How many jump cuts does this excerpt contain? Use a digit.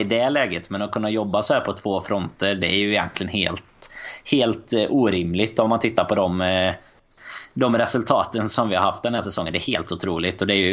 0